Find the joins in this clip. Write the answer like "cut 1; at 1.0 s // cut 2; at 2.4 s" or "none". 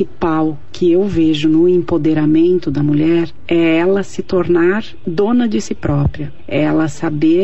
none

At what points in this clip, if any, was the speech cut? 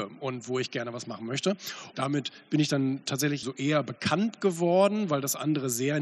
cut 1; at 1.9 s // cut 2; at 3.4 s

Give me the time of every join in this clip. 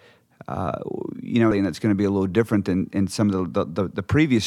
cut 1; at 1.5 s

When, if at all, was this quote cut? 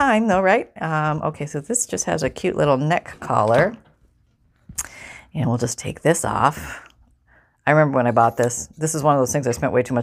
none

